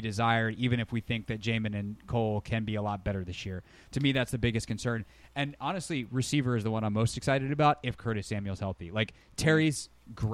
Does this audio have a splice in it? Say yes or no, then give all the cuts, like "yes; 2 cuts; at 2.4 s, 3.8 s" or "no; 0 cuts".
no; 0 cuts